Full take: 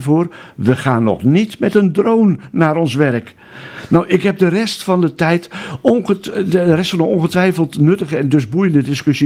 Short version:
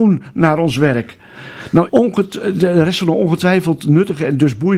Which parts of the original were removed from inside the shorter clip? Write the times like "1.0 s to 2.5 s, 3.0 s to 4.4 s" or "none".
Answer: 4.1 s to 5.8 s